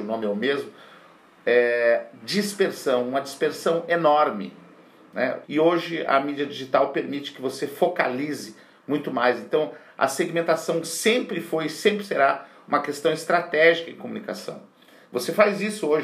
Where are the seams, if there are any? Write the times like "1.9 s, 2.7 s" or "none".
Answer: 5.4 s